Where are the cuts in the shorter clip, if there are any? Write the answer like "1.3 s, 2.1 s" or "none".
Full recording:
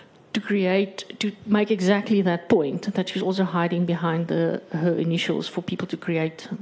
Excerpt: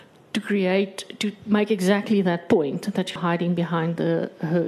3.2 s